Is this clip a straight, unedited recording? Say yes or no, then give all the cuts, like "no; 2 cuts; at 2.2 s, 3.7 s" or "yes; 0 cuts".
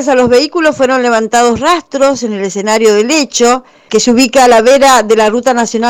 no; 1 cut; at 3.9 s